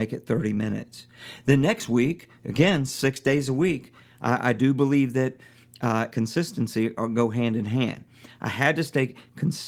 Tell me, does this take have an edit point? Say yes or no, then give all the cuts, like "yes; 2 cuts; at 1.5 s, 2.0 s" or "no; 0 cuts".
yes; 1 cut; at 6.1 s